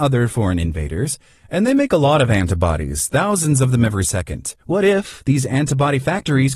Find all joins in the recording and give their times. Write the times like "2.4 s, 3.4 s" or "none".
4.6 s